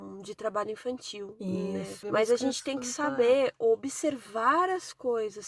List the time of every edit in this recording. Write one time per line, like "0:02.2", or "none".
0:02.0